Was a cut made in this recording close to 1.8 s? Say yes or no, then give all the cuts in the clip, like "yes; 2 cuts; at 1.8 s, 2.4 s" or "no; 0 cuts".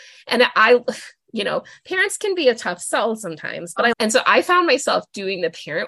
no; 1 cut; at 3.9 s